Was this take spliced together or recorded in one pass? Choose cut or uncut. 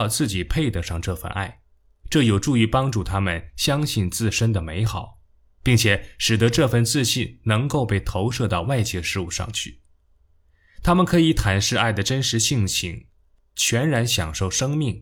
uncut